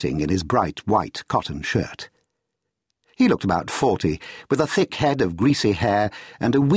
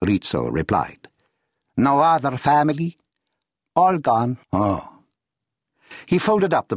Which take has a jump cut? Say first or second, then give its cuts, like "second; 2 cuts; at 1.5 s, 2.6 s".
second; 1 cut; at 4.4 s